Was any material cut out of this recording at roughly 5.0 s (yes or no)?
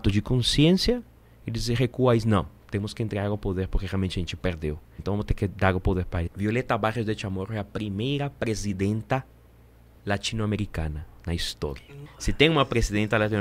yes